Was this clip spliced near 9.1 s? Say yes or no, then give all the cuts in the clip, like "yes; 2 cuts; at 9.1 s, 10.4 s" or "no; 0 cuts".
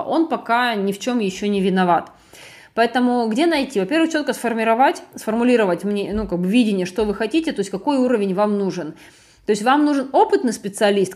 no; 0 cuts